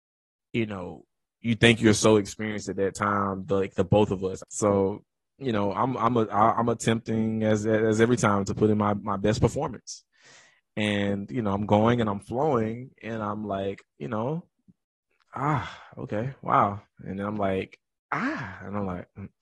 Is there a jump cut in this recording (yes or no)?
yes